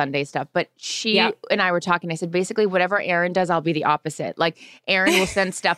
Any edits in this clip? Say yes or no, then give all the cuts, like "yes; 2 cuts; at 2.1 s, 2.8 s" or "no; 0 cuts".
no; 0 cuts